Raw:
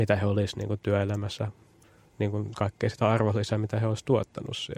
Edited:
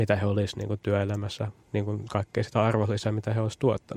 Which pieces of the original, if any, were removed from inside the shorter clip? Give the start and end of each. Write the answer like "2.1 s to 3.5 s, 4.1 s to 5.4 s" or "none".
1.6 s to 2.1 s